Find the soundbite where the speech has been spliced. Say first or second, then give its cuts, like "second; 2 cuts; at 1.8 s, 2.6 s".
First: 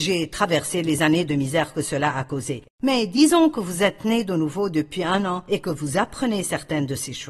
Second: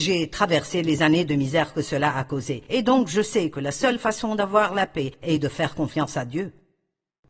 first; 1 cut; at 2.6 s